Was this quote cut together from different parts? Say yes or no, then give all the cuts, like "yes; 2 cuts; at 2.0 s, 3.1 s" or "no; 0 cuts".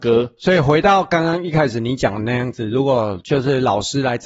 no; 0 cuts